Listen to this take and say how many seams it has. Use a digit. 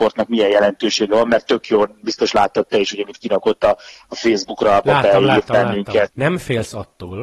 1